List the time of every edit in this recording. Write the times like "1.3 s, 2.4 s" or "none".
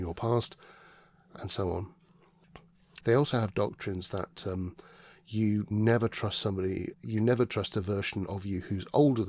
3.0 s, 6.9 s